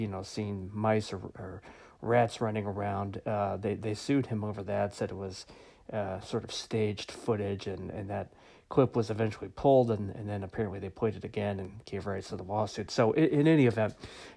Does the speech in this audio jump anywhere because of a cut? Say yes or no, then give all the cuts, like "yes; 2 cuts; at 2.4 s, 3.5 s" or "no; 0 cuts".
no; 0 cuts